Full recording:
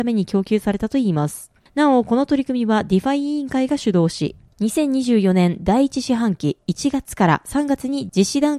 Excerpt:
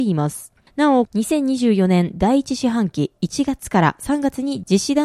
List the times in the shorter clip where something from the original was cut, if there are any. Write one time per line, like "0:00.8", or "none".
0:01.1